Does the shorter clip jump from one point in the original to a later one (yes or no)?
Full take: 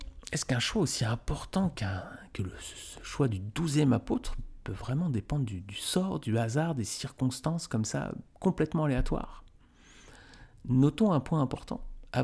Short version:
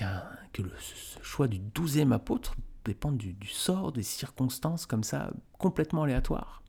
yes